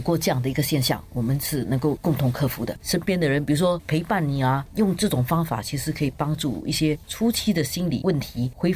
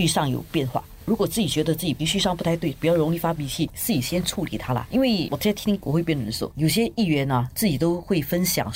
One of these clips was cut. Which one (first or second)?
first